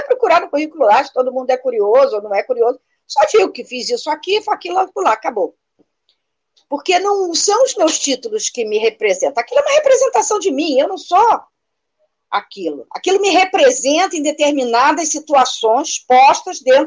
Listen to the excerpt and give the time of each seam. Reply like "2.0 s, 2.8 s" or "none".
none